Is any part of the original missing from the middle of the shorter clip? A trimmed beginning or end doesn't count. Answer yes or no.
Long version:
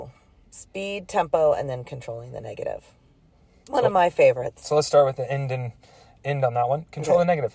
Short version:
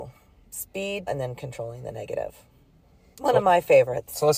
yes